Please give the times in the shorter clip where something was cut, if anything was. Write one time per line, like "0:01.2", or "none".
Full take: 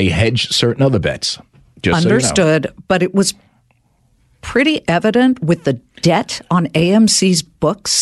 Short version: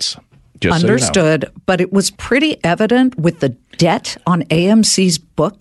0:02.2